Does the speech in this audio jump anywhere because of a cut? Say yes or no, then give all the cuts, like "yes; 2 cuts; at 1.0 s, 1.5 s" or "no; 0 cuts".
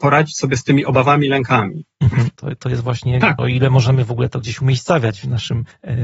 yes; 2 cuts; at 2.4 s, 3.4 s